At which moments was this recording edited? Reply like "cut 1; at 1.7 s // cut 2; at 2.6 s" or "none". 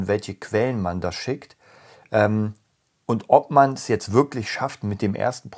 none